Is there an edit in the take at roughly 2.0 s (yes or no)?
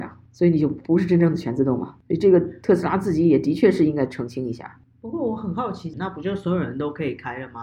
no